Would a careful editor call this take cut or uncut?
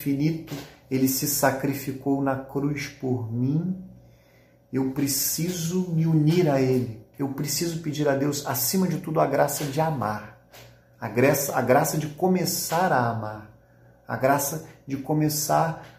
cut